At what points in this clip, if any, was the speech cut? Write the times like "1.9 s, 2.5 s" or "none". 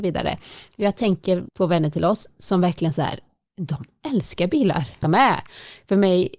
1.5 s, 5.0 s